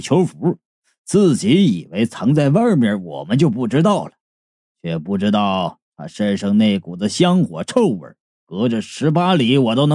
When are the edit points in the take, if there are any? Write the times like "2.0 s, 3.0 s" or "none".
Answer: none